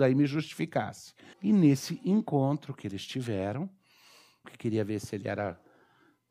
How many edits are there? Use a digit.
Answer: 2